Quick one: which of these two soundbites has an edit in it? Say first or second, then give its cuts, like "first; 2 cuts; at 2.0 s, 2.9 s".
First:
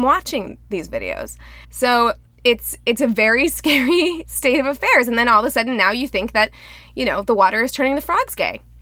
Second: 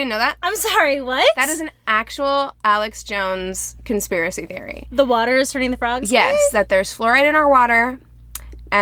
first; 1 cut; at 1.6 s